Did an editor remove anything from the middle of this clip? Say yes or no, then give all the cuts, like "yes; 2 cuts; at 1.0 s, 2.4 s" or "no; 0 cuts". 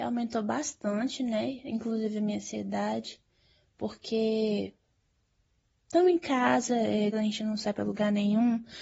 yes; 1 cut; at 7.1 s